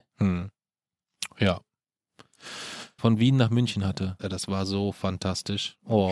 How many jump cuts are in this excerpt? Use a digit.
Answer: 2